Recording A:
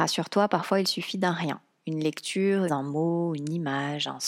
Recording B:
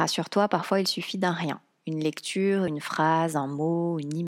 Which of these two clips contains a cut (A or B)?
A